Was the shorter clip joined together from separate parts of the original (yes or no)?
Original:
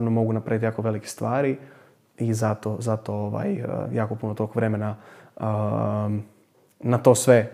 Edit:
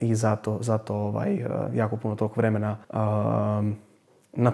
yes